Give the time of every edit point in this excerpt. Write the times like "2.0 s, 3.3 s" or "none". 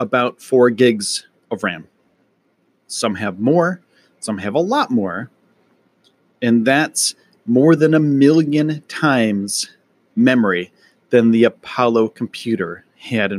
none